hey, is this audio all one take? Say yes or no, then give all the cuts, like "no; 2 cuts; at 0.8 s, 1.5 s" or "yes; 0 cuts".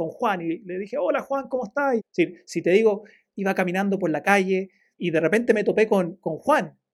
no; 2 cuts; at 2.0 s, 5.0 s